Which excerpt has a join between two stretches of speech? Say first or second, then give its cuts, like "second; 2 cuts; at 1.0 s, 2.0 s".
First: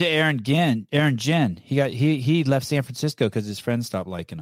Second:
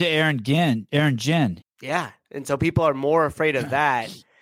second; 1 cut; at 1.6 s